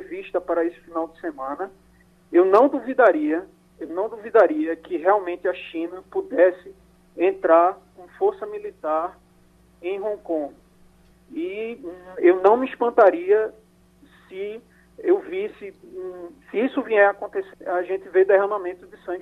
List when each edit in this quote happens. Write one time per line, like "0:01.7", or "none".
0:11.1
0:17.5